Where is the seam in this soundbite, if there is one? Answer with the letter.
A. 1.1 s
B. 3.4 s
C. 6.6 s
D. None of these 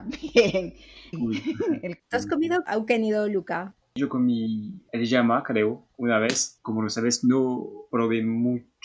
A